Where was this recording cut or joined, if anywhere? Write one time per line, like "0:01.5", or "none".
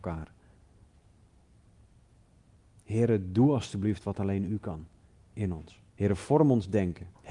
0:05.9